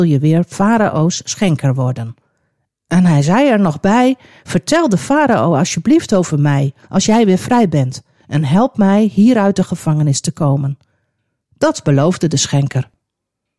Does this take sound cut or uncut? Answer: uncut